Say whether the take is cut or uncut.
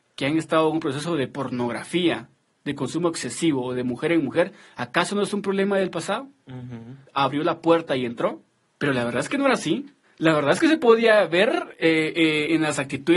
cut